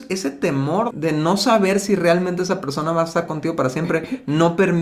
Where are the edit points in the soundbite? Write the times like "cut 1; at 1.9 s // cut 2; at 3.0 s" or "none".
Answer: cut 1; at 0.9 s